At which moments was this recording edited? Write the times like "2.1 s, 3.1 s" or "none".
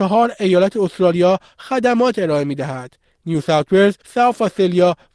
4.0 s